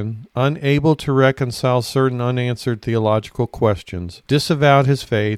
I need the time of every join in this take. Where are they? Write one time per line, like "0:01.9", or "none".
0:04.2

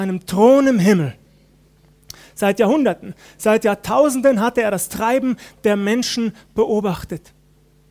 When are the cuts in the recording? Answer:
none

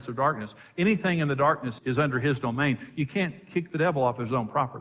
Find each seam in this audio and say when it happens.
0:01.8

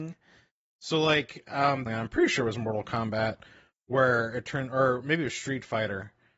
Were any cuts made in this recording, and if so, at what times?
0:01.9

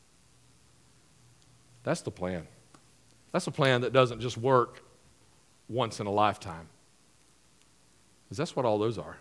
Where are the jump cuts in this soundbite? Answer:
none

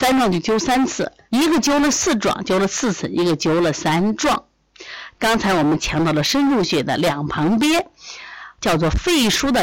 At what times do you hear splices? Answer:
0:01.3
0:05.1
0:08.6

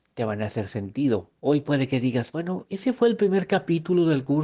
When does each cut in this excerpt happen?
0:01.4
0:02.7

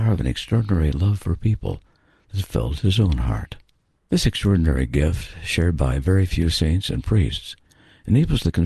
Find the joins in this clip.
0:04.0

